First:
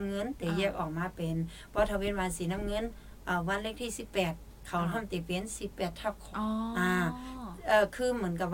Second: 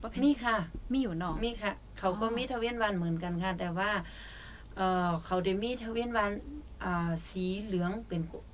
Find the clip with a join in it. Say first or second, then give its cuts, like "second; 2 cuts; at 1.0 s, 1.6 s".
first; 1 cut; at 6.3 s